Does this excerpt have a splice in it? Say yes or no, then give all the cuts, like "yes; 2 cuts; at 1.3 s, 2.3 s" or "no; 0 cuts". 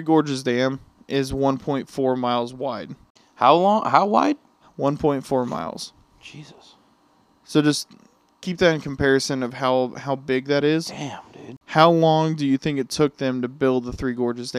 no; 0 cuts